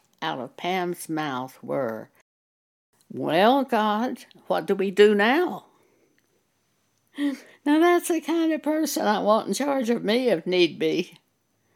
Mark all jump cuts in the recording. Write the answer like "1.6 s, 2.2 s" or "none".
none